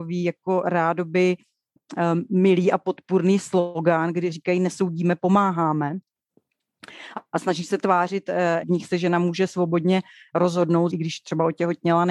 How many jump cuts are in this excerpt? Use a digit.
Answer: 2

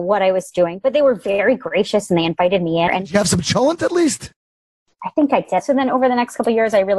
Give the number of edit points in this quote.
2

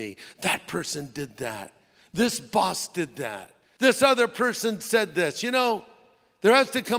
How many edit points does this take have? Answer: 1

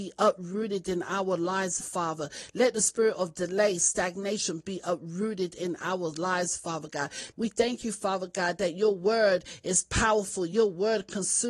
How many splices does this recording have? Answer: 2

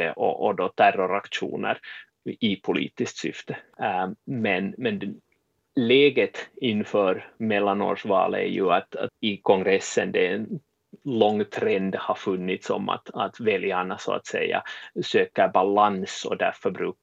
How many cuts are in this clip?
2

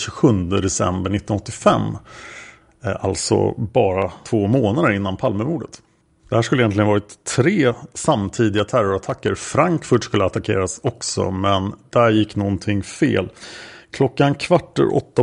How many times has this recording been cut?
0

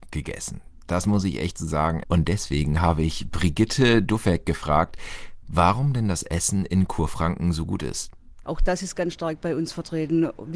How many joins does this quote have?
2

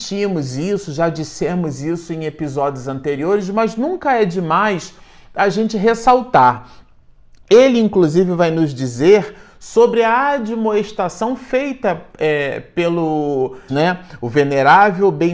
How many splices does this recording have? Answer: 1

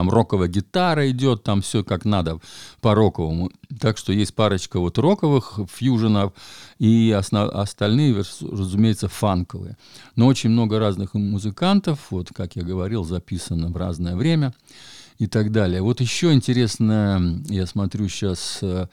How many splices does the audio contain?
0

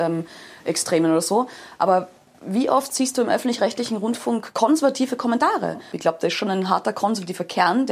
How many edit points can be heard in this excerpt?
1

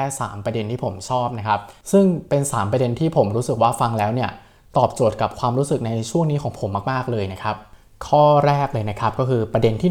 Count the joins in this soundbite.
0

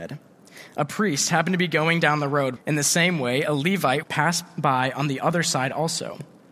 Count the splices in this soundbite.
2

